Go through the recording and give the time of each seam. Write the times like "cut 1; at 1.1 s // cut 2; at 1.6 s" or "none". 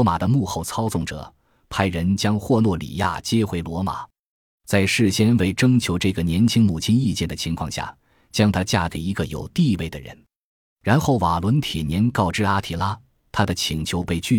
none